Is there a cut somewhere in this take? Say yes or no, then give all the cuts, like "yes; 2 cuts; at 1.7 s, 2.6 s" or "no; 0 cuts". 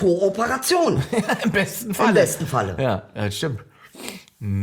no; 0 cuts